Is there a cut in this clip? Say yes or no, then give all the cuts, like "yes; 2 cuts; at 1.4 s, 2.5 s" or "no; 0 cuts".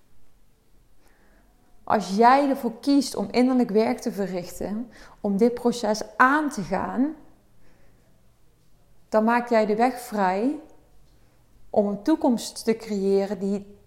no; 0 cuts